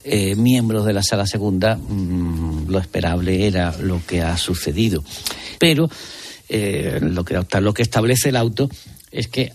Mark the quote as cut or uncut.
cut